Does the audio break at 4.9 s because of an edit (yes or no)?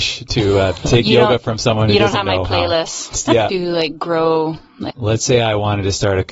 yes